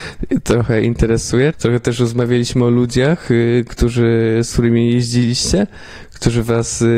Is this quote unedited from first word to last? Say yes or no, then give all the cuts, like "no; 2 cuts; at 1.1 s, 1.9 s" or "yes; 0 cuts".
no; 1 cut; at 1.5 s